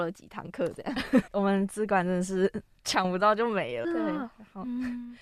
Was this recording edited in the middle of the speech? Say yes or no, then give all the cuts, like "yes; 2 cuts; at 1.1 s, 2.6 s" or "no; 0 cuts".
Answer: yes; 2 cuts; at 1.3 s, 3.8 s